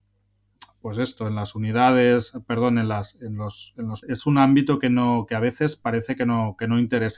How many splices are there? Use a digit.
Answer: 1